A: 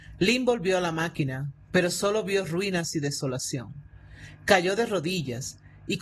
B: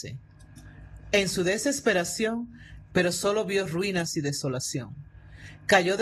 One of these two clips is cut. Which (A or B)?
B